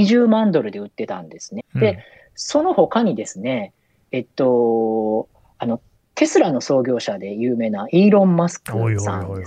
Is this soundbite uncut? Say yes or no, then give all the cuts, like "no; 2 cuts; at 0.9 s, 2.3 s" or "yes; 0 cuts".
no; 1 cut; at 1.6 s